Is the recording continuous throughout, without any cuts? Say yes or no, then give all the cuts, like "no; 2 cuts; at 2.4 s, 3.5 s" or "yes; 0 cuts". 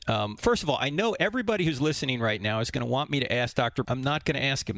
no; 1 cut; at 3.8 s